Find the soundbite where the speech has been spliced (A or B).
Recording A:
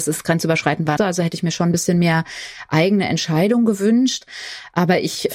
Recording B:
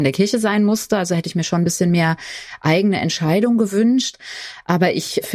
A